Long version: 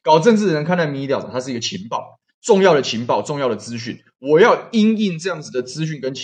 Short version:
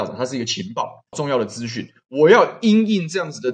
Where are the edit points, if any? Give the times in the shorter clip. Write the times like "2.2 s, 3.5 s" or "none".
1.1 s